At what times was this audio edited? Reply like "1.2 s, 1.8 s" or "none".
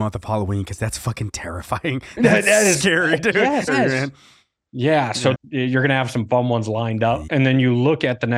3.7 s, 5.3 s, 7.3 s